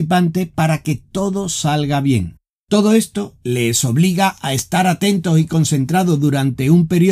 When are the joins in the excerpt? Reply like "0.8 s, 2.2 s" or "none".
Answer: none